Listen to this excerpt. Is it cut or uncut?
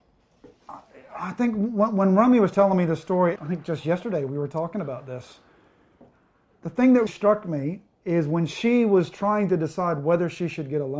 cut